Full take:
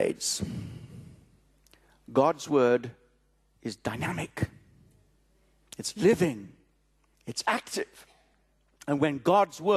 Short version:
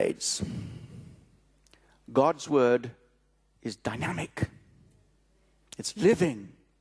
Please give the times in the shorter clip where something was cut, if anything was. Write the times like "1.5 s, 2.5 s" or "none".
none